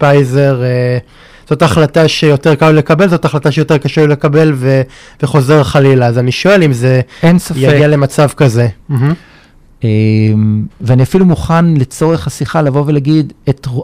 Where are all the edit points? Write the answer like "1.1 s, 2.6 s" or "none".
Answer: 8.8 s, 10.7 s